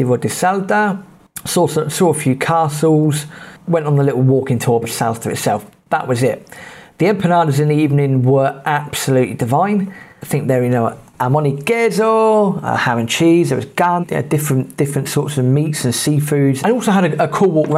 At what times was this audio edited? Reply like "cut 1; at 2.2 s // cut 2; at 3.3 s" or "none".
cut 1; at 4.8 s // cut 2; at 14.0 s // cut 3; at 16.6 s